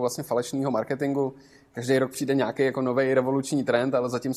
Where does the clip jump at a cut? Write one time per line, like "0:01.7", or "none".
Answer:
none